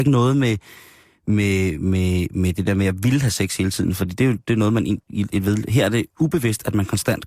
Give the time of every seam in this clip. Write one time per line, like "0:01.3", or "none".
none